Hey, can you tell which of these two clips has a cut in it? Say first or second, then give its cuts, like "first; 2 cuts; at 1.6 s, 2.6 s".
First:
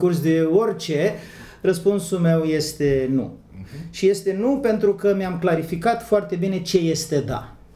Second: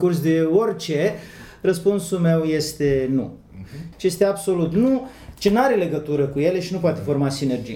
second; 1 cut; at 3.9 s